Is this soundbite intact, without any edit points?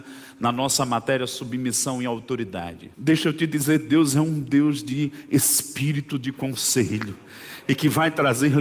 no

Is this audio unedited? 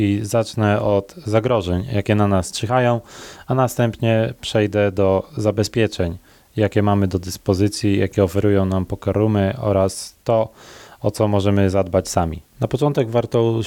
yes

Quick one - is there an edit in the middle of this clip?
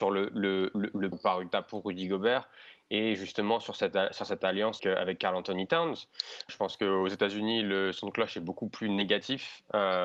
yes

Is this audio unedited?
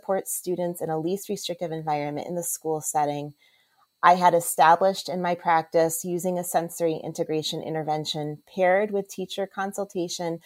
yes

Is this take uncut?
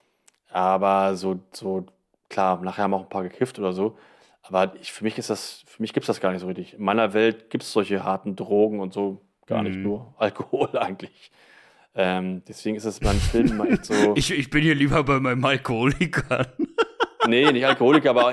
yes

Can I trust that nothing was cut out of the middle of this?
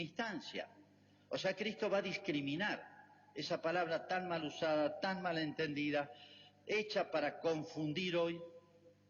yes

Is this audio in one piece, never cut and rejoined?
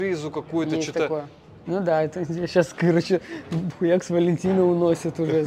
no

